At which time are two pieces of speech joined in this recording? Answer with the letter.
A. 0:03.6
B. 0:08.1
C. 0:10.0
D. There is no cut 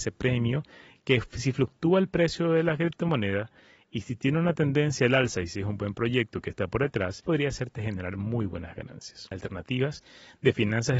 D